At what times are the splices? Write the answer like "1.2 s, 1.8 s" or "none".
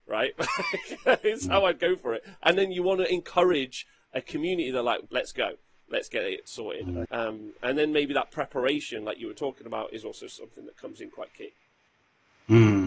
5.1 s, 7.0 s